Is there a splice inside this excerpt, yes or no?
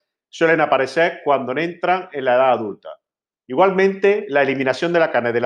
no